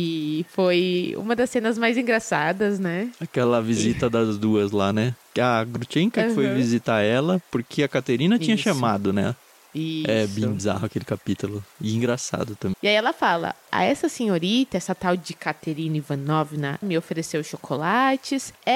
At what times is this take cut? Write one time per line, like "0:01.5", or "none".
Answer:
0:12.7
0:16.8